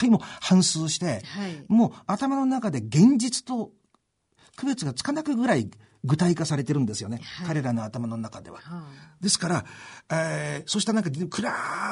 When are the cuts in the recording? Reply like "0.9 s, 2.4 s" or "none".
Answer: none